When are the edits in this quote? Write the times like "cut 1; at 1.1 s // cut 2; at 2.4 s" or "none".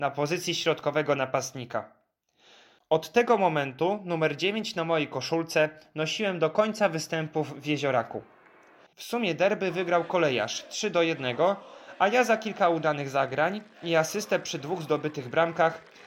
cut 1; at 8.9 s